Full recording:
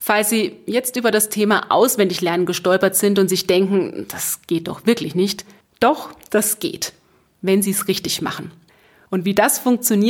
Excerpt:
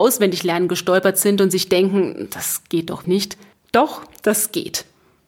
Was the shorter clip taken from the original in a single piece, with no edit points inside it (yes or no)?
no